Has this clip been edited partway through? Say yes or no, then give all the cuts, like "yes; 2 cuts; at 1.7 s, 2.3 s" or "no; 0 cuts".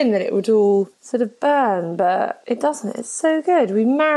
yes; 1 cut; at 0.9 s